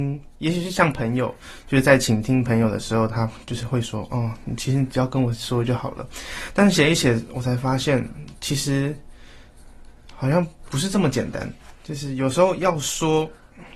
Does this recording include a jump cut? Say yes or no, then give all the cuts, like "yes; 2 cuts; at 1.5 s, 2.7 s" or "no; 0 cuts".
no; 0 cuts